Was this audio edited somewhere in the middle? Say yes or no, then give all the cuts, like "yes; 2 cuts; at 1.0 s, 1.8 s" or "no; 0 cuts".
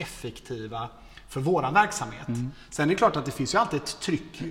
no; 0 cuts